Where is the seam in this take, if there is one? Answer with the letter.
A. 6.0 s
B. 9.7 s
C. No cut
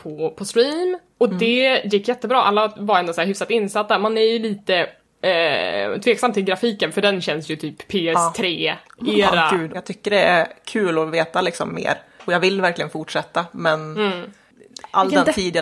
B